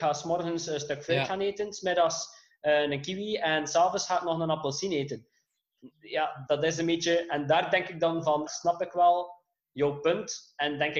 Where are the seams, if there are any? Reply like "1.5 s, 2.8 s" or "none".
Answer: 6.5 s, 8.5 s